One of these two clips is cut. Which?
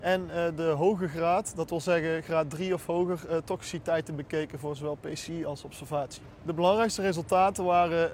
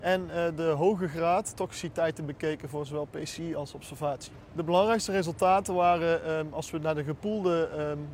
second; 1 cut; at 1.5 s

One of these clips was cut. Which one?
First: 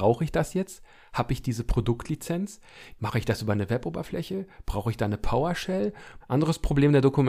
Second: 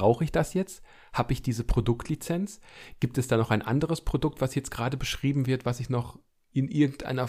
first; 2 cuts; at 3.0 s, 6.2 s

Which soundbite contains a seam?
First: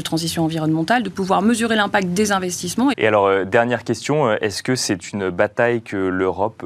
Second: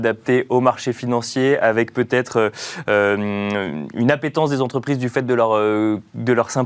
first; 1 cut; at 2.9 s

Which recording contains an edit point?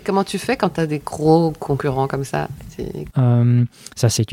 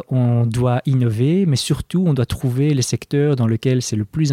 first; 1 cut; at 3.1 s

